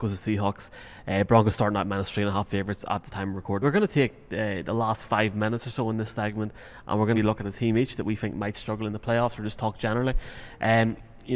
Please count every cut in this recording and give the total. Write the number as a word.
two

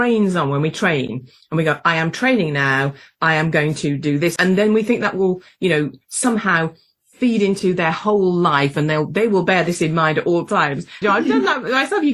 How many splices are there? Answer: two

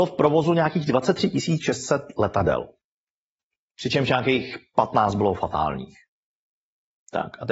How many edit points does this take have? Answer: one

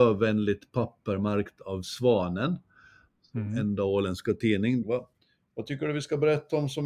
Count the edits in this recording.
one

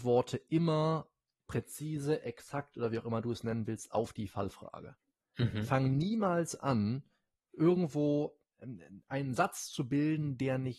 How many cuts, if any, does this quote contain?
zero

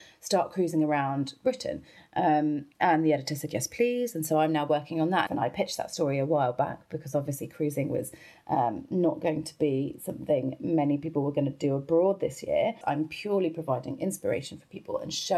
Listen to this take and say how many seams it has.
two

